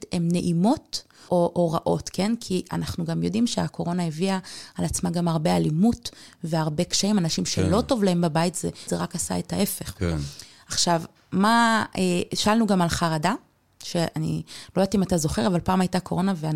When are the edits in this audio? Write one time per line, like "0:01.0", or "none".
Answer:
0:01.3
0:08.9